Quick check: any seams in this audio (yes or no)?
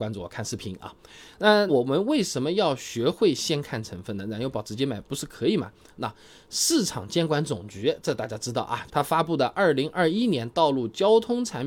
yes